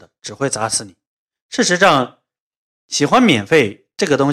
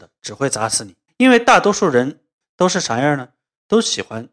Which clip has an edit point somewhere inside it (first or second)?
second